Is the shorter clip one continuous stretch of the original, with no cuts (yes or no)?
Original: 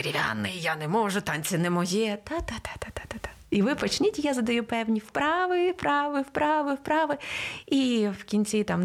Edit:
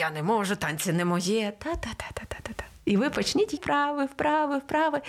no